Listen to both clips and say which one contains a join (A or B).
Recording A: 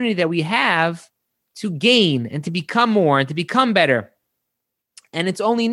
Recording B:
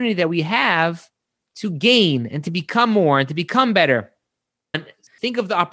B